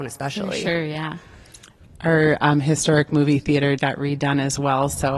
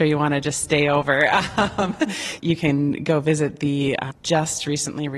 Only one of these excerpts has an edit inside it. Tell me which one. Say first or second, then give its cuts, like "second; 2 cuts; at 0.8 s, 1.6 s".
first; 1 cut; at 3.8 s